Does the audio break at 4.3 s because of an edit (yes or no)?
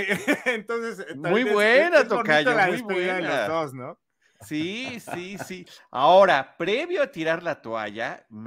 no